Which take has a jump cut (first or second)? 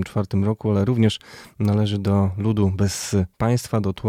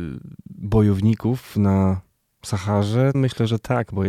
second